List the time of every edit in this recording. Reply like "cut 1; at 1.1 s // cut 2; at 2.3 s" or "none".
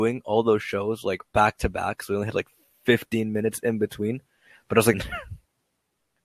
cut 1; at 4.9 s

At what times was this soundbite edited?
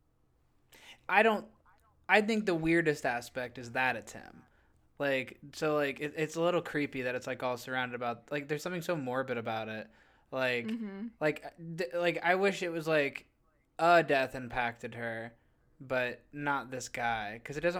cut 1; at 1.1 s

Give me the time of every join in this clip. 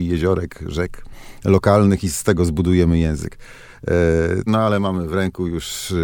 cut 1; at 4.5 s

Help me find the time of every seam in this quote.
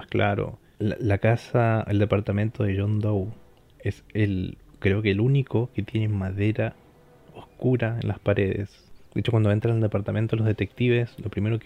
none

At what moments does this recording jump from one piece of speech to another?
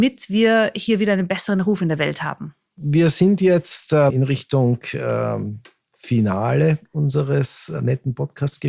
cut 1; at 4.1 s

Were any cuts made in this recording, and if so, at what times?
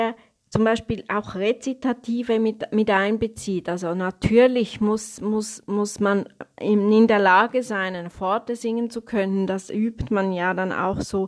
none

